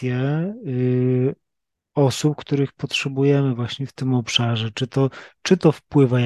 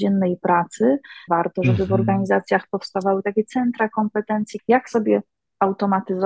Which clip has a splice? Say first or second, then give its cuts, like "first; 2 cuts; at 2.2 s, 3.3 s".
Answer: second; 2 cuts; at 1.3 s, 4.6 s